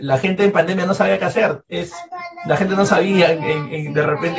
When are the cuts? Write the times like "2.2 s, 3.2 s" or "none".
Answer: 1.7 s